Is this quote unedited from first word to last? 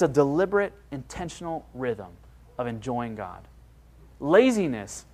yes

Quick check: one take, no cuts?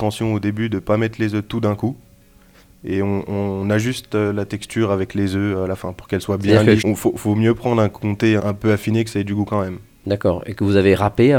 no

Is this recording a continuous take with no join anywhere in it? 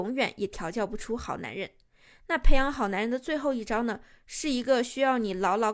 yes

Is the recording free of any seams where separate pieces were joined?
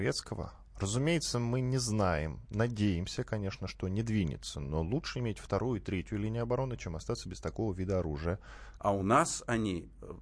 no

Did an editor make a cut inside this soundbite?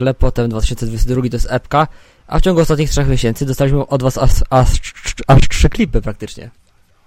no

